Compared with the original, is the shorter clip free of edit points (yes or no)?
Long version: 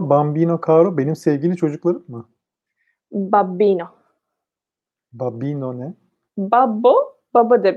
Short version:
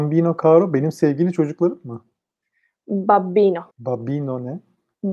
no